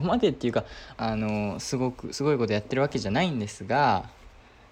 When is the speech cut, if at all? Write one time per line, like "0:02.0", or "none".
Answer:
0:01.0